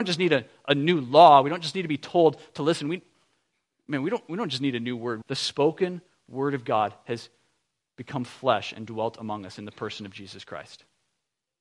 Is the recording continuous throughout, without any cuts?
no; 1 cut; at 5.2 s

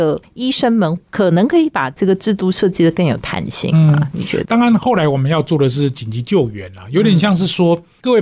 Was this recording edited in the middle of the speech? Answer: no; 0 cuts

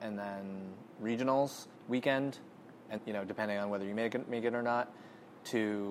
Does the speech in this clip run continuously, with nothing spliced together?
no; 2 cuts; at 1.7 s, 3.0 s

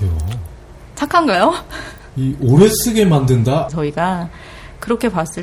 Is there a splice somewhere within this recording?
yes; 1 cut; at 3.7 s

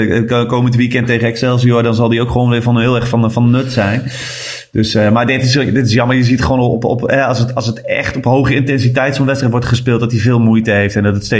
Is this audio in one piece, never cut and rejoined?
yes; 0 cuts

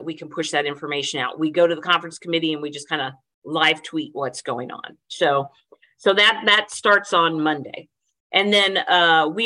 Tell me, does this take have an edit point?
no; 0 cuts

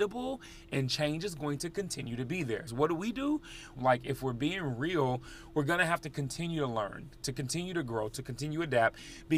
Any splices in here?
yes; 2 cuts; at 2.7 s, 3.7 s

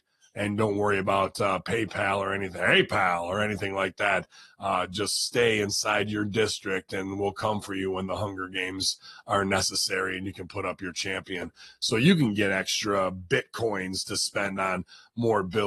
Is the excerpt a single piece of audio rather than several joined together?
yes; 0 cuts

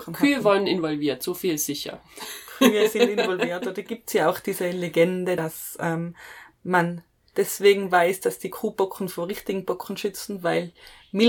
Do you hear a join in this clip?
no; 0 cuts

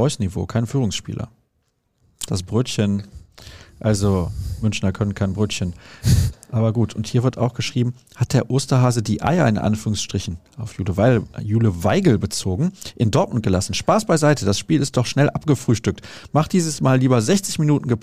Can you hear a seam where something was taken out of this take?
yes; 2 cuts; at 2.3 s, 6.3 s

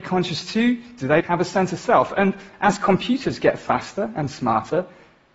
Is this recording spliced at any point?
yes; 1 cut; at 1.2 s

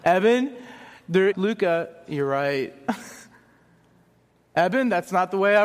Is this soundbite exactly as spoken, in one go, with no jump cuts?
no; 1 cut; at 1.3 s

